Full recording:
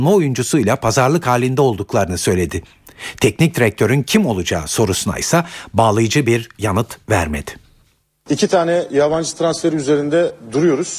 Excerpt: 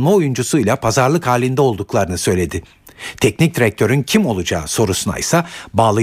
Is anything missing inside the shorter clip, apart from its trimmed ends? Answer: no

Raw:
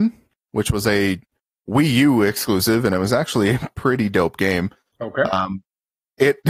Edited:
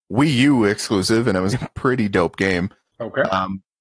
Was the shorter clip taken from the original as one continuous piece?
no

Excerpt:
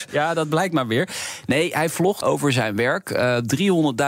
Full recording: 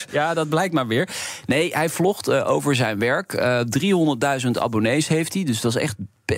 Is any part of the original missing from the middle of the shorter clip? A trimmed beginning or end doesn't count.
yes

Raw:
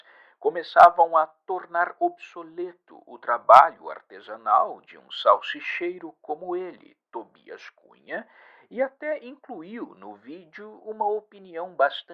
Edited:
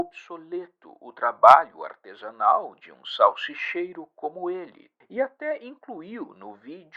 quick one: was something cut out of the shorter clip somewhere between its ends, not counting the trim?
yes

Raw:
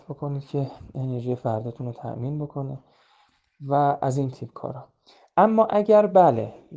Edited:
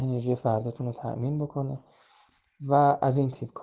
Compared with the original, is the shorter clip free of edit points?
yes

